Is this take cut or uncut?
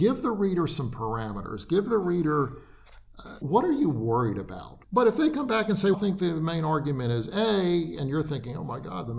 cut